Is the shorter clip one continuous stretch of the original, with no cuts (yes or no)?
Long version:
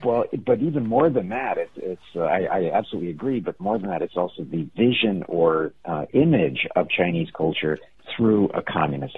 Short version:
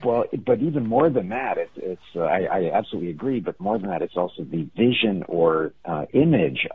yes